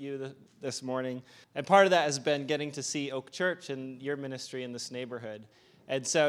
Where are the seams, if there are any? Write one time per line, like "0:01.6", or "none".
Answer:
0:01.4